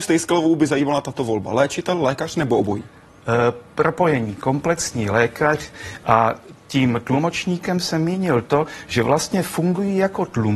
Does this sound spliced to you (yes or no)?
yes